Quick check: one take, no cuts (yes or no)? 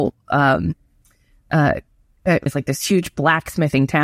no